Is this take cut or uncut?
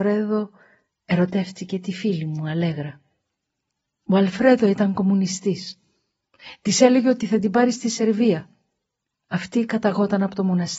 uncut